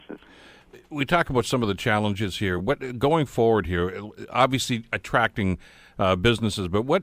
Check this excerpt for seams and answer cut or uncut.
uncut